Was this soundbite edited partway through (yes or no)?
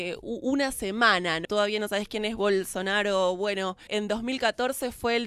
yes